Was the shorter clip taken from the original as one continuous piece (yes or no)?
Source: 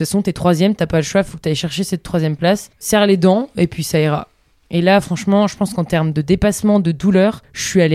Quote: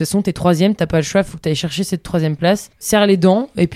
yes